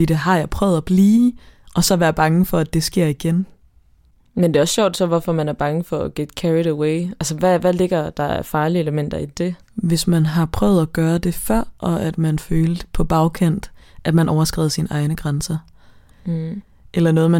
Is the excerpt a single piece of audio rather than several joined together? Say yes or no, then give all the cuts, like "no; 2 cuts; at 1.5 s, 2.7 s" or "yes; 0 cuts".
no; 1 cut; at 16.1 s